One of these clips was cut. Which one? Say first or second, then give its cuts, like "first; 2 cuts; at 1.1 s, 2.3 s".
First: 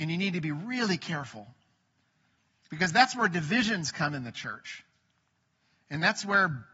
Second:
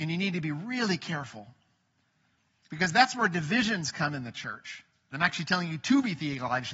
second; 1 cut; at 5.1 s